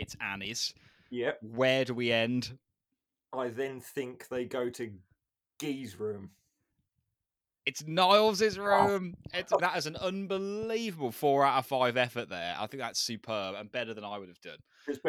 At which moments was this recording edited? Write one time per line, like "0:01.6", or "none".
0:09.6